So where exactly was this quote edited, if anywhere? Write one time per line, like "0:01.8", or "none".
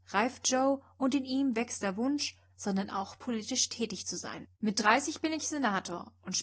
0:02.5
0:04.5